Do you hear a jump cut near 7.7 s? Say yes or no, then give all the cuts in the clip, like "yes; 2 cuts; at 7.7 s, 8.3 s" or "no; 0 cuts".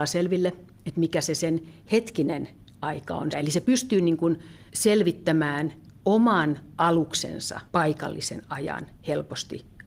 yes; 3 cuts; at 3.3 s, 4.7 s, 7.7 s